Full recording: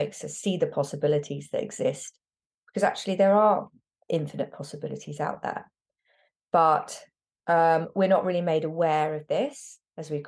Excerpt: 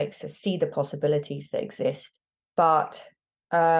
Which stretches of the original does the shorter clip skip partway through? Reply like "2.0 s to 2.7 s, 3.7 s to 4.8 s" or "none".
2.4 s to 6.4 s

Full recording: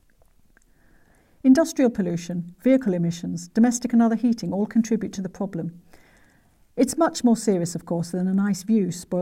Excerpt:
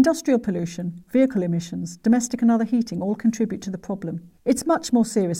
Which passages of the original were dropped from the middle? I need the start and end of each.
5.9 s to 6.7 s

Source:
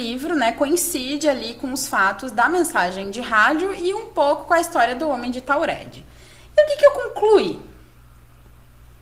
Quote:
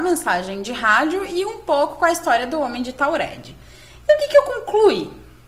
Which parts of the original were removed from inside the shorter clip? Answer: none

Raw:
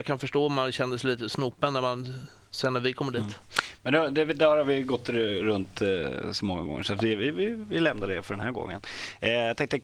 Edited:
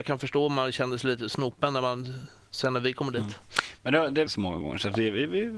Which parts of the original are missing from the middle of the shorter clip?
4.3 s to 6.3 s

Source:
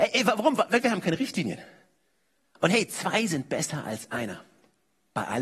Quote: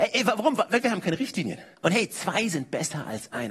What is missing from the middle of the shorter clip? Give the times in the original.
1.7 s to 2.5 s

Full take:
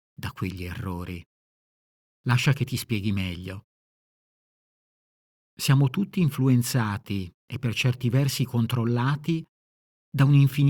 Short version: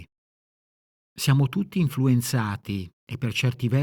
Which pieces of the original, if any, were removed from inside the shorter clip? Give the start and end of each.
2.1 s to 5.4 s

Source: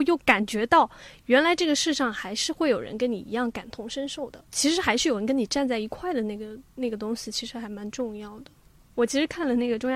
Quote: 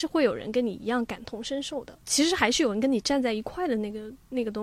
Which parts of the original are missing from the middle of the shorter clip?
none

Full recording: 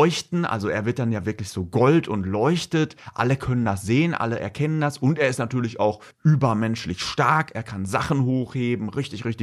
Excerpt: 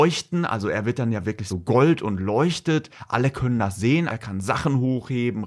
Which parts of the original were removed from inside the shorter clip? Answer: 1.5 s to 1.6 s, 4.1 s to 7.5 s

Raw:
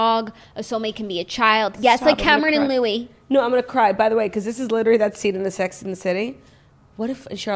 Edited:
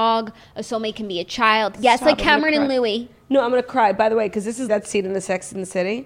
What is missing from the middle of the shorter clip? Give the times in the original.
4.7 s to 5.0 s

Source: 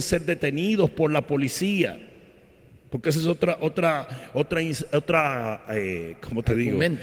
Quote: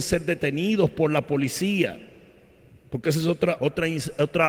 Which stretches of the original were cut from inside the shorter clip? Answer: 3.6 s to 4.3 s

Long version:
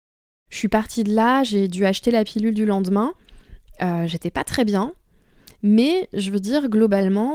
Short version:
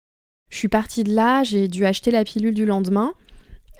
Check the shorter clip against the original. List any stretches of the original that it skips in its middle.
none

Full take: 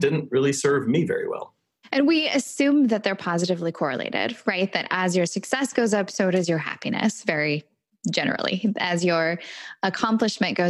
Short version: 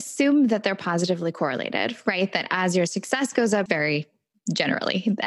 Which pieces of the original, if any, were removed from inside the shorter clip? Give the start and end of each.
6.1 s to 7.2 s

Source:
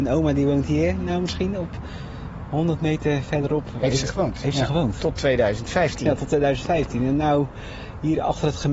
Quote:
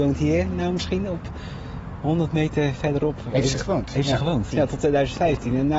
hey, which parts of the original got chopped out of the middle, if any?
5.0 s to 6.0 s

